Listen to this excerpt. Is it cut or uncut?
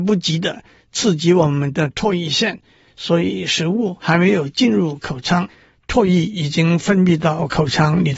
uncut